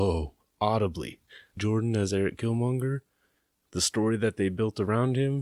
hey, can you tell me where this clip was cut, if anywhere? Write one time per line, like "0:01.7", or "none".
0:01.6

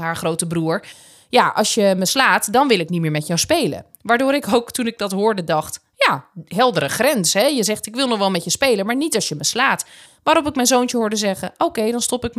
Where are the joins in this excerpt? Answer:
none

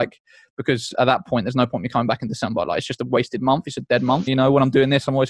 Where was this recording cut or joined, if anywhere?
0:04.3

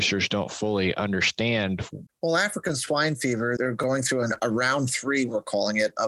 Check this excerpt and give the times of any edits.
0:02.1
0:03.6

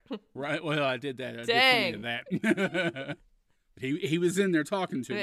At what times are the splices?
none

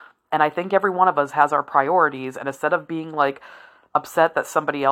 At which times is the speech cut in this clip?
none

